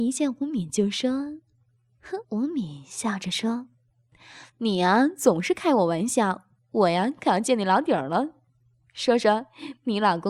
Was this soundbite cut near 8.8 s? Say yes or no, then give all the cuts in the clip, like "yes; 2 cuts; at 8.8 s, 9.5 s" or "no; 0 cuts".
no; 1 cut; at 2.2 s